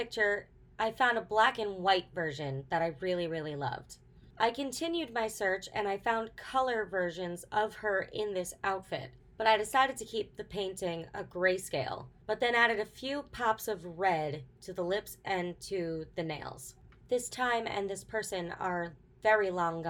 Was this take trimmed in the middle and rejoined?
yes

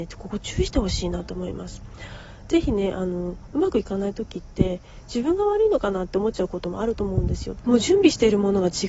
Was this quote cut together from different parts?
yes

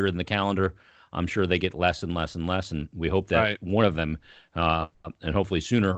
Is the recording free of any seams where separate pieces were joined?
yes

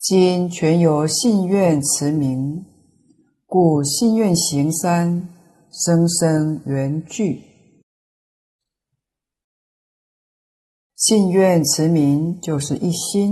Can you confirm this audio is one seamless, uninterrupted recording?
yes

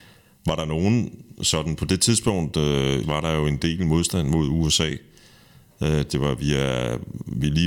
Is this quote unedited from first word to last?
no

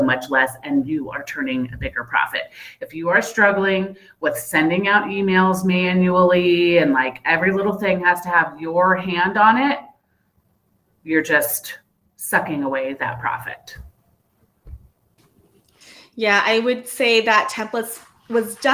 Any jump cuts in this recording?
no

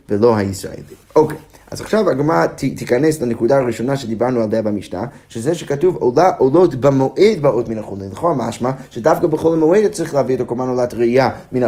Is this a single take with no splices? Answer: no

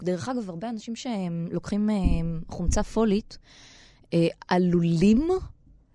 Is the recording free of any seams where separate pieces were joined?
yes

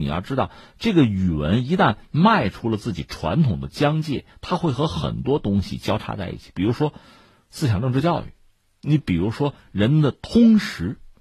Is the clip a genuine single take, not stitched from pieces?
yes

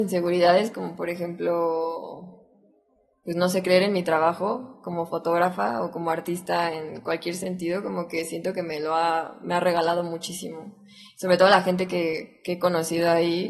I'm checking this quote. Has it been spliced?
no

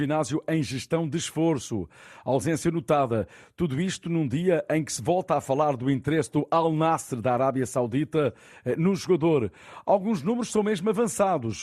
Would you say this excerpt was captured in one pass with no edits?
yes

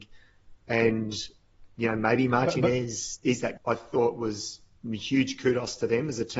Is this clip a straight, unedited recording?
no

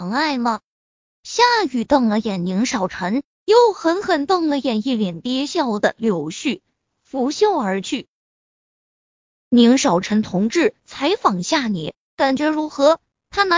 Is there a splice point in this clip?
yes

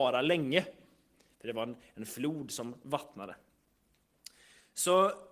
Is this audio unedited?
yes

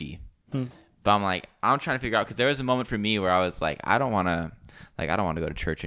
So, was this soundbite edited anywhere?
no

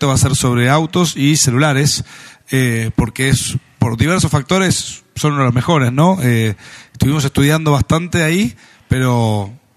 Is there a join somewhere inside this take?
no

